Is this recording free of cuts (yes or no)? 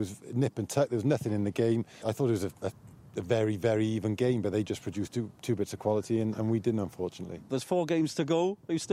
no